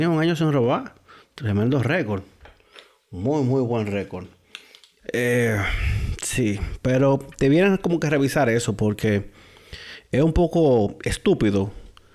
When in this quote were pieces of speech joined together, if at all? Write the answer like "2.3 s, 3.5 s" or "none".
5.0 s